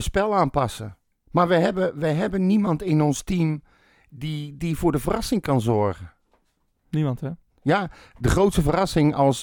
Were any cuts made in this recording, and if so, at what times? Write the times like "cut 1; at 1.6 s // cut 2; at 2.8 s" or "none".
cut 1; at 1.1 s // cut 2; at 7.5 s